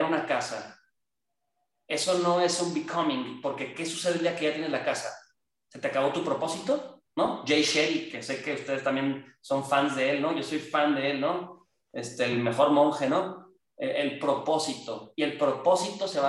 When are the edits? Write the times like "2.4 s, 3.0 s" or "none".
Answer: none